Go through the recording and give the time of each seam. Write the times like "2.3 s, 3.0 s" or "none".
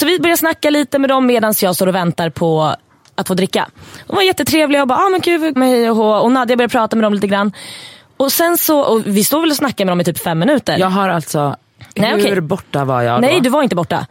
5.6 s